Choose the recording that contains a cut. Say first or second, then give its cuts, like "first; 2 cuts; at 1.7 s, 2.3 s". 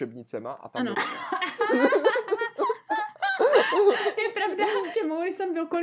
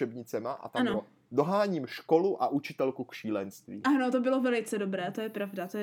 first; 2 cuts; at 0.9 s, 4.9 s